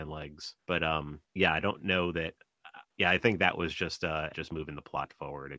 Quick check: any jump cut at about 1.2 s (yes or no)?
yes